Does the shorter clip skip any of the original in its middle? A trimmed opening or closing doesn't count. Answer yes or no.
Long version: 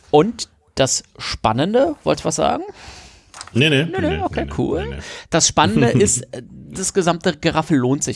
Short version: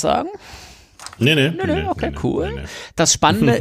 no